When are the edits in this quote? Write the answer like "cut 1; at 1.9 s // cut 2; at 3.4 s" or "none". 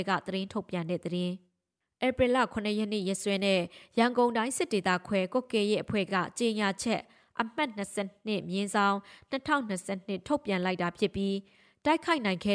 none